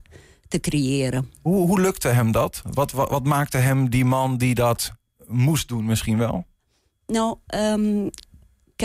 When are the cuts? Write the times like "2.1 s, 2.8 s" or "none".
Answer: none